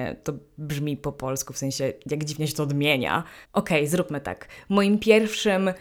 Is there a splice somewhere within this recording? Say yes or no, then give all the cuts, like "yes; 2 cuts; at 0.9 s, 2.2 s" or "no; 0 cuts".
yes; 1 cut; at 3.4 s